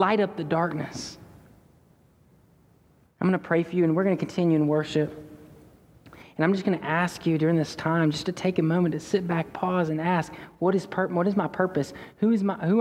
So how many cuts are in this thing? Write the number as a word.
zero